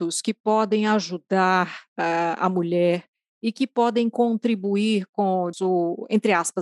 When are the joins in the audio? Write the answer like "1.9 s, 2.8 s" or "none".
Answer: 5.5 s